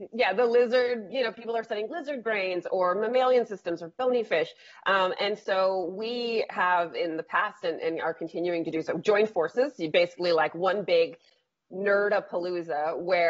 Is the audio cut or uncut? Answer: uncut